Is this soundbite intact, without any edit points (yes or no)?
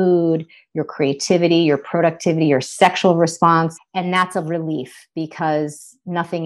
no